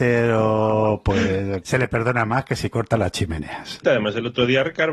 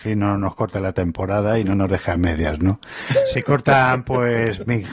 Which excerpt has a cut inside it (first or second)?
first